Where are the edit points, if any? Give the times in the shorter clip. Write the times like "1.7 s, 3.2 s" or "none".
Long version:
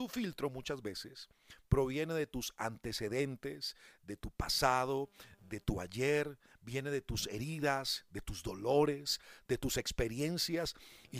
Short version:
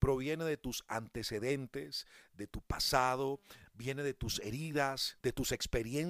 3.7 s, 5.2 s